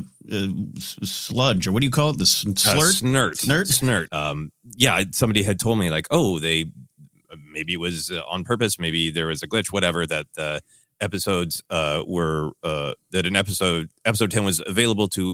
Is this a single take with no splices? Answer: no; 1 cut; at 4.1 s

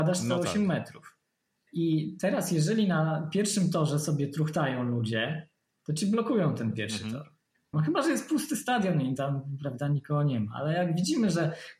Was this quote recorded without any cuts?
no; 1 cut; at 7.7 s

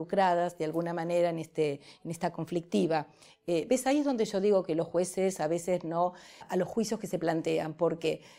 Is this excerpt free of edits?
no; 2 cuts; at 3.3 s, 6.4 s

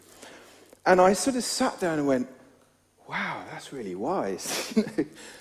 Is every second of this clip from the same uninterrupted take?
yes; 0 cuts

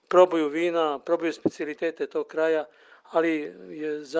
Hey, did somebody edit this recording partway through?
no; 0 cuts

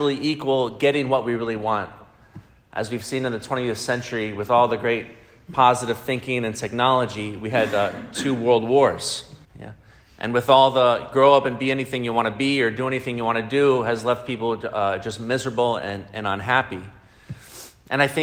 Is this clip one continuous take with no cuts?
no; 1 cut; at 9.4 s

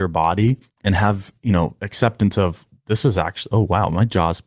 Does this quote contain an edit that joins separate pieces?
no; 0 cuts

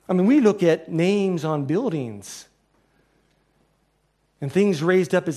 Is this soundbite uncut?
yes; 0 cuts

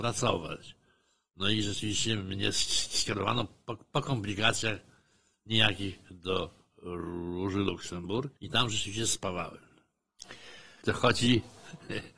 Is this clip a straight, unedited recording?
no; 2 cuts; at 8.4 s, 10.8 s

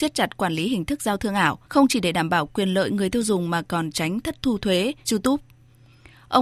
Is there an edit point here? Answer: yes; 2 cuts; at 1.6 s, 5.0 s

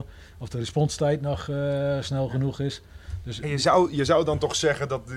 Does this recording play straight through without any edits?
no; 1 cut; at 3.4 s

